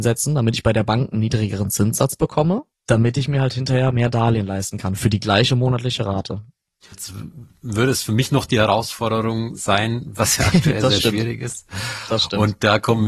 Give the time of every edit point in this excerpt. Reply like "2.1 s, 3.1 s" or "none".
6.9 s, 10.2 s

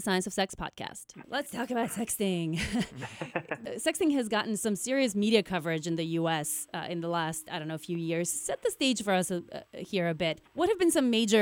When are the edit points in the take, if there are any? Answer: 1.2 s

